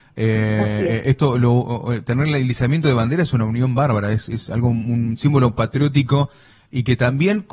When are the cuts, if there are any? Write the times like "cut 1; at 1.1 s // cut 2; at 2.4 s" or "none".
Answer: none